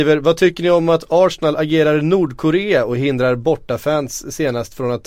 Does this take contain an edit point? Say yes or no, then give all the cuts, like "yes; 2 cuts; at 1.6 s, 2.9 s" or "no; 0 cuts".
no; 0 cuts